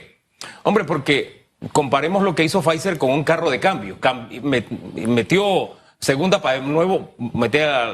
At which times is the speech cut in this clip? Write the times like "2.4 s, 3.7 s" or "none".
none